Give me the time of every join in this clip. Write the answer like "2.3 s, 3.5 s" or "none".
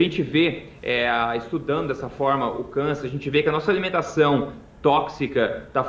none